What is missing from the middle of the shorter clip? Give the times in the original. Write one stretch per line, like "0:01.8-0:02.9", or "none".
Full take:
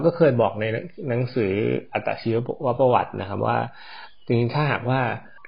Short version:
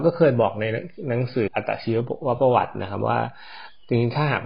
0:01.5-0:01.9